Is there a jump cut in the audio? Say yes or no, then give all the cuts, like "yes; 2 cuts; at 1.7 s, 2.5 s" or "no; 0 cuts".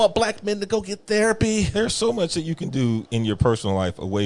no; 0 cuts